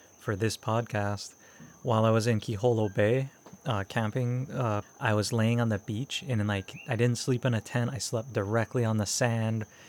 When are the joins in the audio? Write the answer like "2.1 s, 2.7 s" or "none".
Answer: 4.8 s